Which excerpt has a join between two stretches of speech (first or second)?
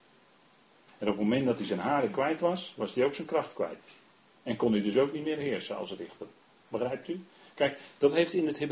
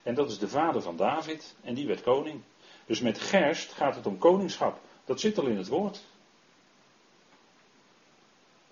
first